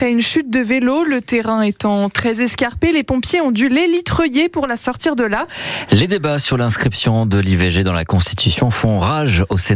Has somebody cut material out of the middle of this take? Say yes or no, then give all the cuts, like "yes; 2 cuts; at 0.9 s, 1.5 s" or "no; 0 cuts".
yes; 1 cut; at 5.9 s